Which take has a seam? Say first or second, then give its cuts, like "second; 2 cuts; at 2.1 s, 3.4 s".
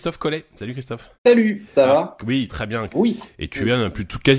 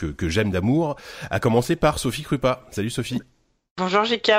first; 2 cuts; at 1.1 s, 2.9 s